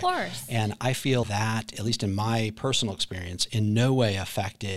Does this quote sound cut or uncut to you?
cut